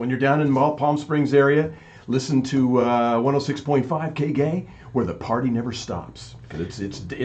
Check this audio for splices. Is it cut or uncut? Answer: uncut